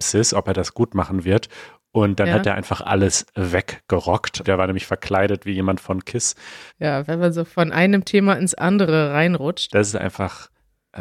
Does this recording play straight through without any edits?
no; 3 cuts; at 4.4 s, 6.7 s, 9.7 s

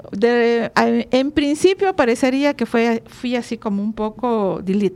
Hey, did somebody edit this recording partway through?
no; 0 cuts

